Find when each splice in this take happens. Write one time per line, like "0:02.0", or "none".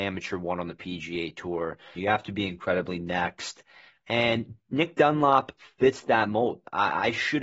0:02.0

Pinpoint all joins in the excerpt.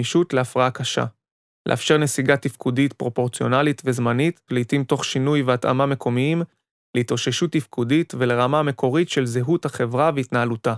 0:04.5

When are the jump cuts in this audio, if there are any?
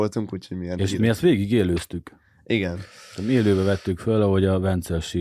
none

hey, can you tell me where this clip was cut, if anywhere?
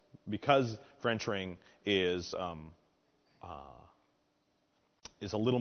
none

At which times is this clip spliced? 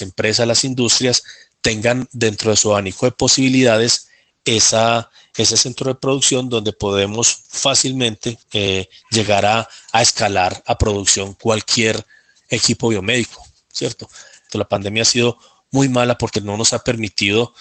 0:08.4
0:14.5

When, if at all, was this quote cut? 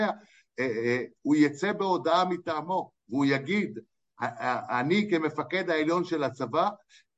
none

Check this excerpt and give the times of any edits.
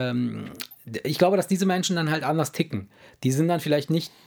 none

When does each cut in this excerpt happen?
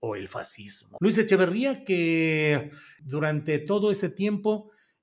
0:01.0
0:03.0

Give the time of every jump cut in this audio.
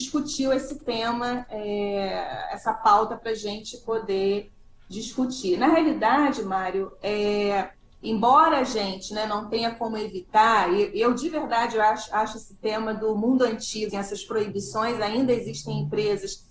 0:13.9

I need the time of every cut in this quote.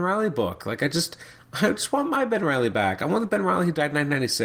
none

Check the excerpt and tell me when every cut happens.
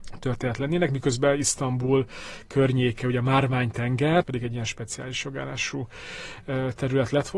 0:04.2

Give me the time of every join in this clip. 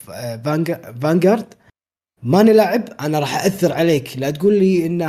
none

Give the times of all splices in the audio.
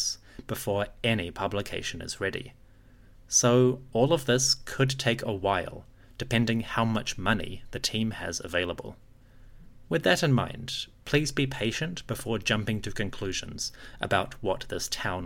none

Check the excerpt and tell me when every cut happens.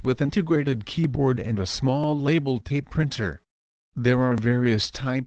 0:03.8

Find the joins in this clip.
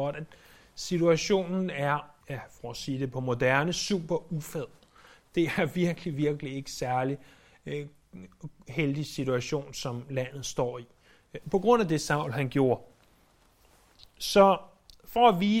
0:02.2

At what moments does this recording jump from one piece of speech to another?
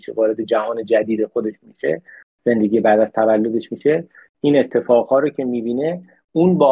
none

